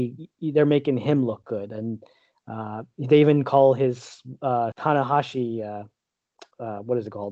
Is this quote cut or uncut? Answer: cut